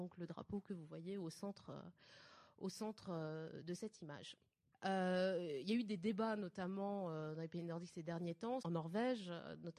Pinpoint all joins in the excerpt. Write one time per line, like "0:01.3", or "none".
0:04.7
0:08.6